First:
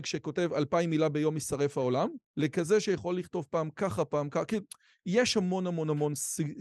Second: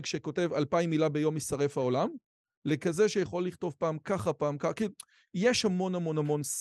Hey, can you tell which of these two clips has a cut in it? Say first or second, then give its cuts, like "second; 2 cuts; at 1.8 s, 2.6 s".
first; 1 cut; at 2.3 s